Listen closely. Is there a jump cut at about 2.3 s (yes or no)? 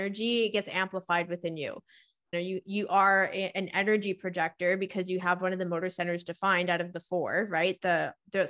yes